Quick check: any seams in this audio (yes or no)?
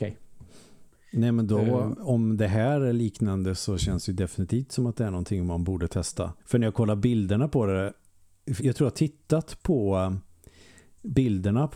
yes